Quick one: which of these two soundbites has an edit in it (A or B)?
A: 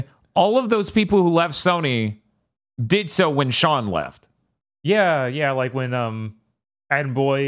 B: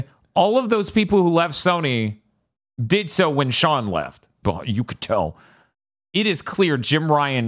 B